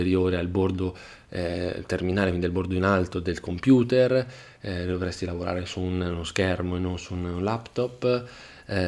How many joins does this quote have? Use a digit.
0